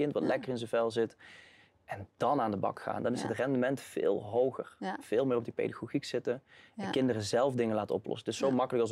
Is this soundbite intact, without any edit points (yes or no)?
yes